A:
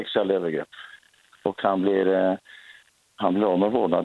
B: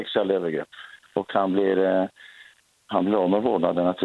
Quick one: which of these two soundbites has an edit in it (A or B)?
B